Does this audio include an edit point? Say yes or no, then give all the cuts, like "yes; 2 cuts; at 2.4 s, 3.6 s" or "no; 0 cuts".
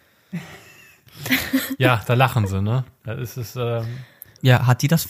no; 0 cuts